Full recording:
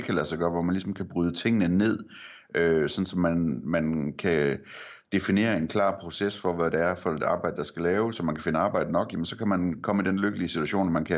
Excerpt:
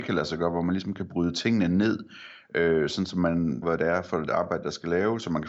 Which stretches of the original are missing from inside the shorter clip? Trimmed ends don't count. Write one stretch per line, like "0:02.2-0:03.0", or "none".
0:03.6-0:06.5